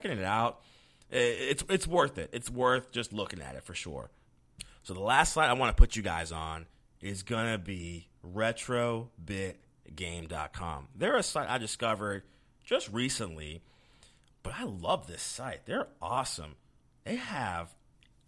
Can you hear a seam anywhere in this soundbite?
no; 0 cuts

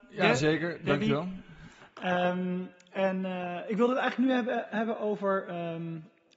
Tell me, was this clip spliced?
no; 0 cuts

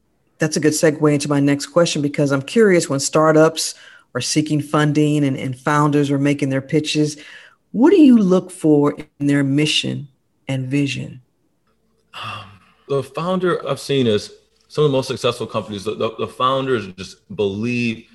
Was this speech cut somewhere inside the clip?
yes; 1 cut; at 13.6 s

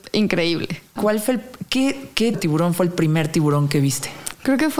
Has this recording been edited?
yes; 2 cuts; at 1.0 s, 2.3 s

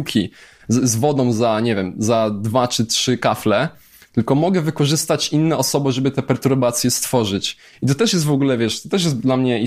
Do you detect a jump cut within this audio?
no; 0 cuts

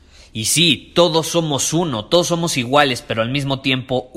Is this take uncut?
yes; 0 cuts

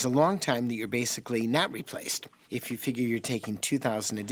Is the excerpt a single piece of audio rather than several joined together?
no; 1 cut; at 2.5 s

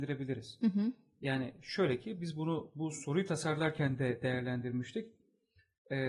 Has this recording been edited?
no; 0 cuts

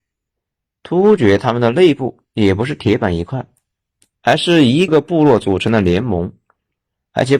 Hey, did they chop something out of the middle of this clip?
yes; 1 cut; at 4.9 s

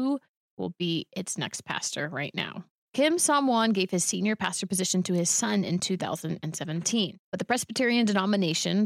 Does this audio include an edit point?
yes; 1 cut; at 7.2 s

